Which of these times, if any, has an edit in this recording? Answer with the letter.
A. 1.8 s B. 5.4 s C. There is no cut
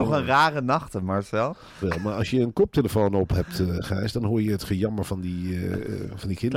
A